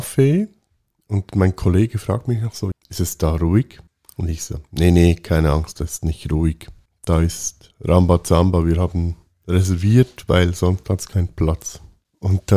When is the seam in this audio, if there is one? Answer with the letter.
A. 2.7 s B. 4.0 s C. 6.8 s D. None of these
A